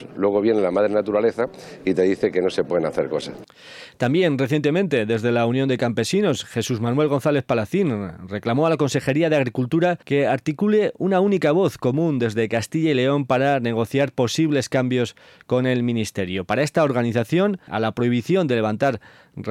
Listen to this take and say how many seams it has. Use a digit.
2